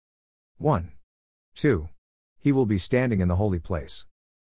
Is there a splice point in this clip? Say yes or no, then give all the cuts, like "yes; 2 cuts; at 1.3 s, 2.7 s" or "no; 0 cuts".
yes; 1 cut; at 1.4 s